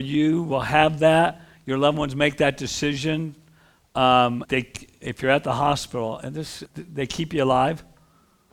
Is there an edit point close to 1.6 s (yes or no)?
no